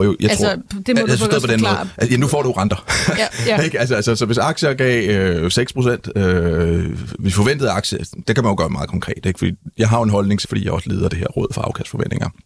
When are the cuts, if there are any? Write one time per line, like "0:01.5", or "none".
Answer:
0:08.2
0:10.4